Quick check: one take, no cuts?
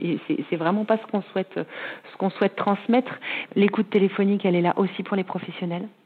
no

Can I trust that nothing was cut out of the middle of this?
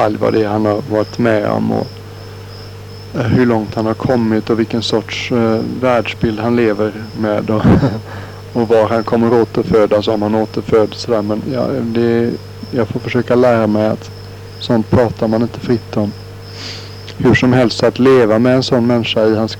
yes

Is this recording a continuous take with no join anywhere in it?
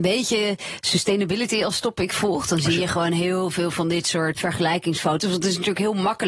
no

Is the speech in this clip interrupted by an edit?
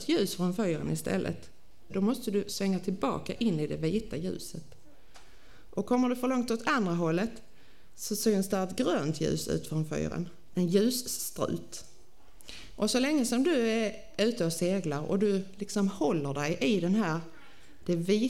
yes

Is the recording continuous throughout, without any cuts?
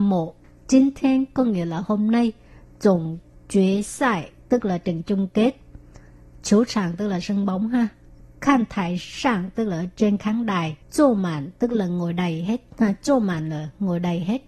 no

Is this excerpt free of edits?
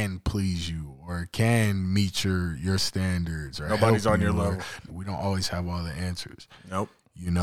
no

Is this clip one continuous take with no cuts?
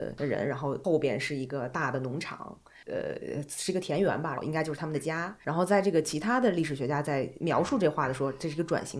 no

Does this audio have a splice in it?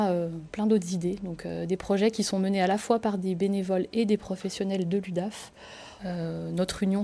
yes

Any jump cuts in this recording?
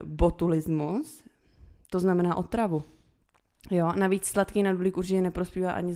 no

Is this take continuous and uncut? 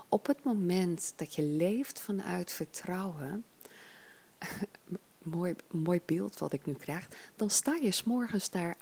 yes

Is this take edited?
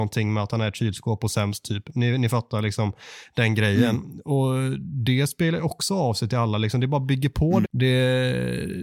yes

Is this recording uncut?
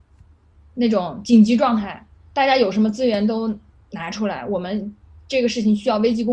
yes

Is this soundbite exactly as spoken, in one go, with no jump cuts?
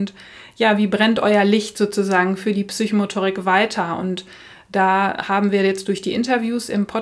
yes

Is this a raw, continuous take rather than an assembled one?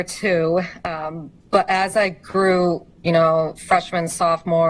no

